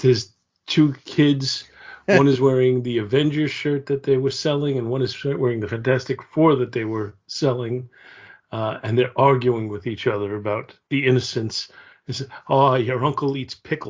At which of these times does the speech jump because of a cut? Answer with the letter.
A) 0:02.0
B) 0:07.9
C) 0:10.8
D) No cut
C